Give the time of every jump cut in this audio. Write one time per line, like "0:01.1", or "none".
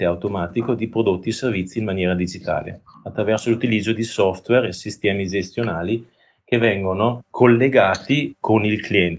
none